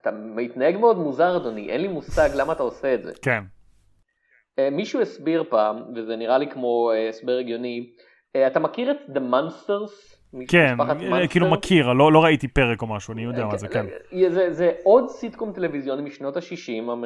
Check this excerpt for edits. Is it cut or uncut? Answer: uncut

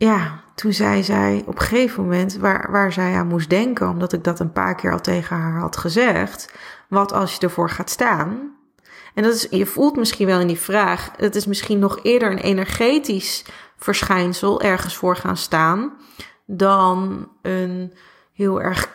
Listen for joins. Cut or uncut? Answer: uncut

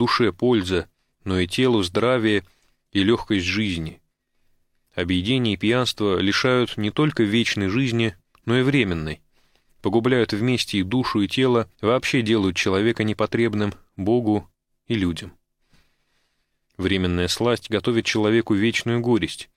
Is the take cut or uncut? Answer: cut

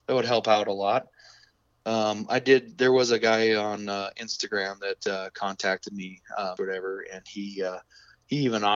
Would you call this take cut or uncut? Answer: cut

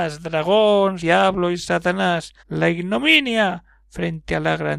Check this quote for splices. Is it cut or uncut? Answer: cut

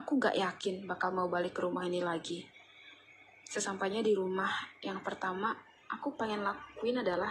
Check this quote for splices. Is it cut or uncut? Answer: uncut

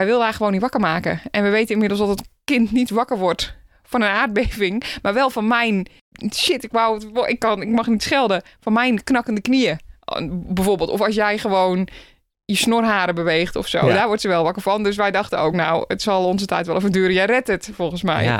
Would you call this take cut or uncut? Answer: uncut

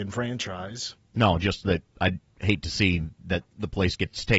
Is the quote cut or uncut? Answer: cut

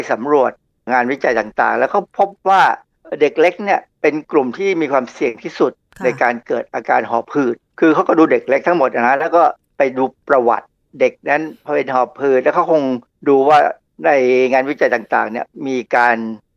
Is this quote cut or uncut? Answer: cut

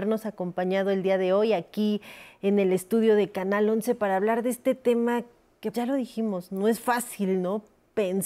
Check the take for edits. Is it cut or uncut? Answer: cut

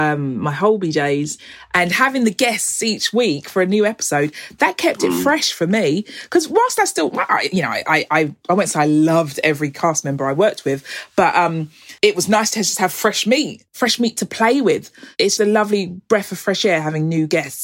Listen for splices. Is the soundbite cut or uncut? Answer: cut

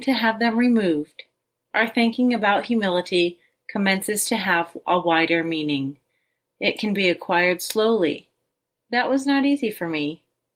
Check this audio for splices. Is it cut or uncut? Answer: cut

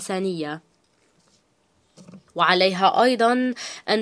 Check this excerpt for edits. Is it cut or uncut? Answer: cut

